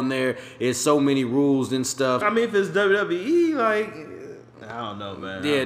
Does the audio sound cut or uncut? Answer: cut